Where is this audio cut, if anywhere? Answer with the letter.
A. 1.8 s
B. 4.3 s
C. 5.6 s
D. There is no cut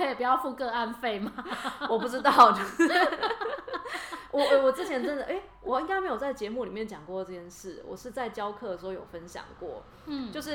D